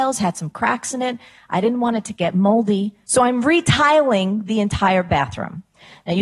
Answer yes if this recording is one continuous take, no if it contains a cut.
yes